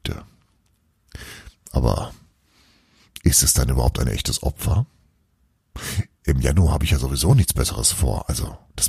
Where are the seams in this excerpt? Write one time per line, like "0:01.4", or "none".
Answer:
none